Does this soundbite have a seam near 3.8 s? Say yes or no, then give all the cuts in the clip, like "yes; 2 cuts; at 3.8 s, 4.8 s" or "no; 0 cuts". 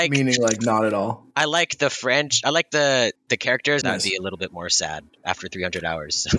yes; 2 cuts; at 1.3 s, 3.8 s